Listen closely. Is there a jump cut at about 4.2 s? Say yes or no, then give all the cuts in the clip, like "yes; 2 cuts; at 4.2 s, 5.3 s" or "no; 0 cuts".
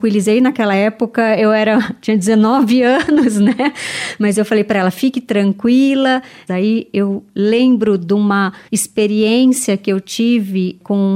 no; 2 cuts; at 6.5 s, 8.7 s